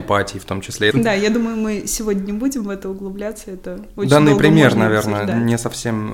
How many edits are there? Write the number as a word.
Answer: one